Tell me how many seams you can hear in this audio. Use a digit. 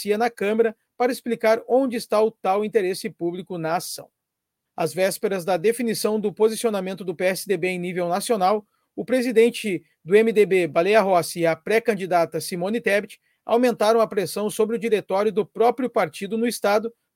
1